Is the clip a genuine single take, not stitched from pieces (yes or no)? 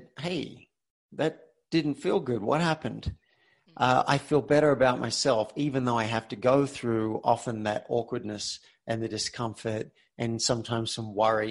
yes